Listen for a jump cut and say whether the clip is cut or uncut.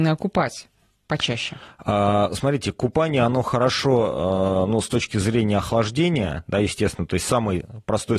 uncut